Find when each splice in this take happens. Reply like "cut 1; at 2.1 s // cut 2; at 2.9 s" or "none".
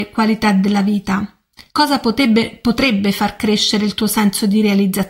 cut 1; at 1.7 s

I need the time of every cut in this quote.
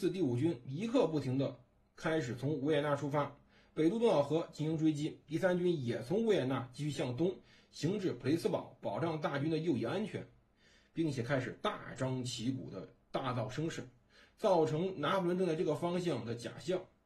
none

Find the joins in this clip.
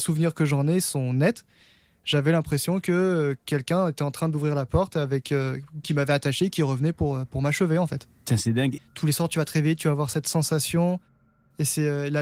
cut 1; at 5.8 s // cut 2; at 8.8 s

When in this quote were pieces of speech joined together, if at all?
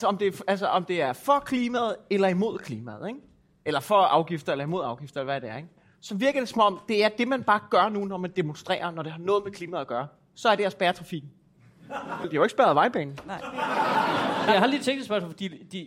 cut 1; at 12.2 s

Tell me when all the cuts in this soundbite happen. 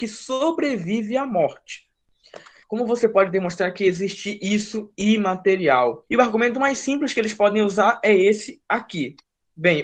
cut 1; at 2.6 s // cut 2; at 6.1 s

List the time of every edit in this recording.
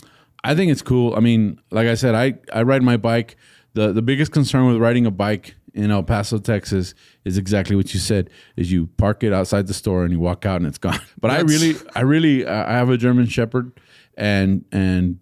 cut 1; at 11.1 s

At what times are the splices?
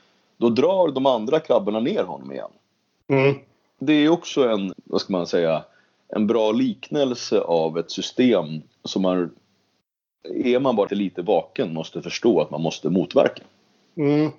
cut 1; at 4.7 s // cut 2; at 10.9 s

